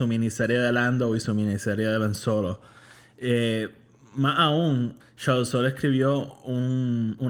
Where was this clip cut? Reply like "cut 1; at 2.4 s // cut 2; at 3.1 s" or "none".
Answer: cut 1; at 5.0 s